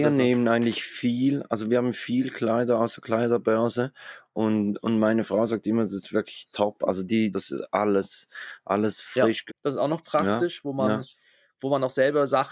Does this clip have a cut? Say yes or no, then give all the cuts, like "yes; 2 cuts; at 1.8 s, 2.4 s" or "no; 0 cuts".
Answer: yes; 2 cuts; at 7.3 s, 9.5 s